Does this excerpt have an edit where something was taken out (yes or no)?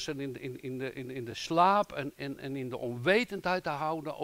no